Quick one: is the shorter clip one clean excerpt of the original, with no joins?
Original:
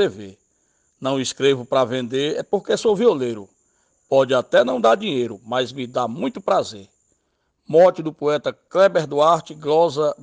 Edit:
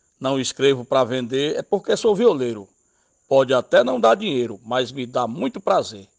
yes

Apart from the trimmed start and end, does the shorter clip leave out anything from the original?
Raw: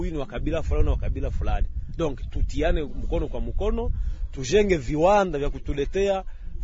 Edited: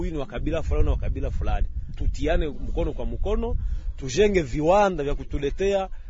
yes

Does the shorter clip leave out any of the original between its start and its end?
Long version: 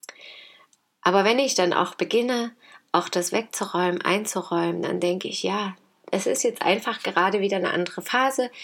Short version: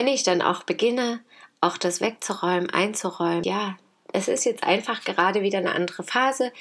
yes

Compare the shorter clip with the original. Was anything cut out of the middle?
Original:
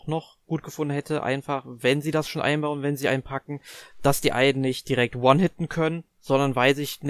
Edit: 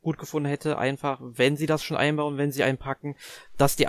no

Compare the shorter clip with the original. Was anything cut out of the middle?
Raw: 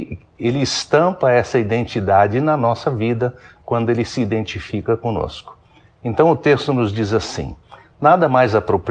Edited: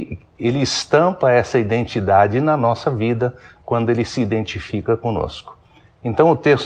no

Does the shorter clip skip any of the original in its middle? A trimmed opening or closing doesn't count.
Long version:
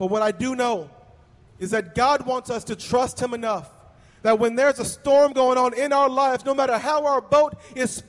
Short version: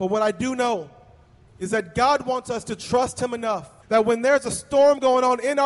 yes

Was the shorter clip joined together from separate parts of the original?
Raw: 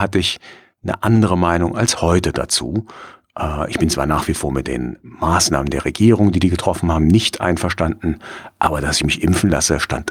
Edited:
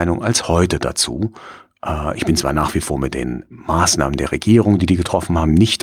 no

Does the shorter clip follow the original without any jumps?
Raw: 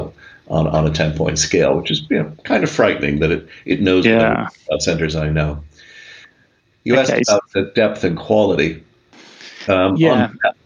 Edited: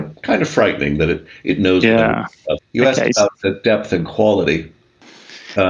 no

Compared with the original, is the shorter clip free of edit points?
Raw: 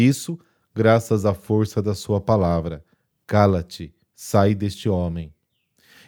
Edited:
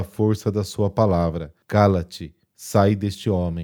no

